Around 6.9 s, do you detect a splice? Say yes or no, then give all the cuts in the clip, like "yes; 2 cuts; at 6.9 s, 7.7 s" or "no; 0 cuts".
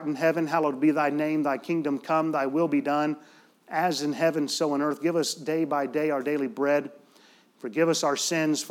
no; 0 cuts